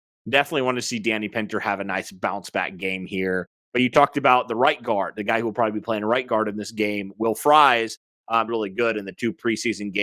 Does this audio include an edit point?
yes; 1 cut; at 8.5 s

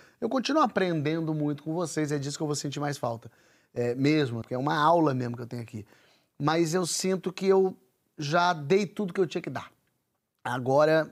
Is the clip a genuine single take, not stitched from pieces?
no; 1 cut; at 4.4 s

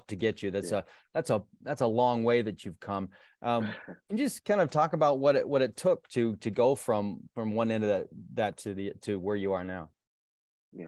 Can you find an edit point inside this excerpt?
no; 0 cuts

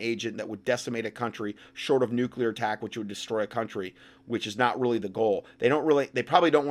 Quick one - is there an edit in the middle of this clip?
no; 0 cuts

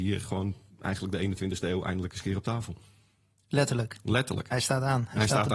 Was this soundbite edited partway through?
no; 0 cuts

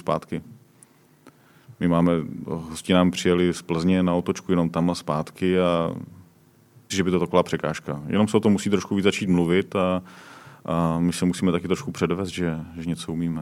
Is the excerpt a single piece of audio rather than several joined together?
no; 1 cut; at 6.9 s

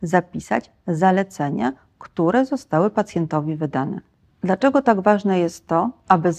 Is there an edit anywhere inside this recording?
no; 0 cuts

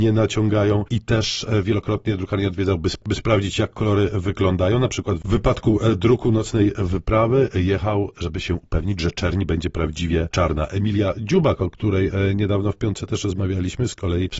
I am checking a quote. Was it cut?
no; 0 cuts

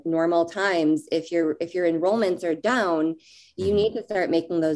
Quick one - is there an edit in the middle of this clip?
no; 0 cuts

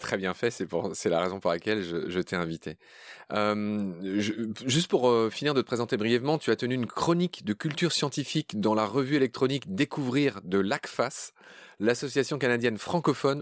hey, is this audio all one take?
yes; 0 cuts

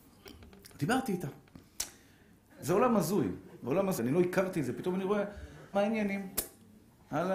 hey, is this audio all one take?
no; 3 cuts; at 2.5 s, 4.0 s, 5.7 s

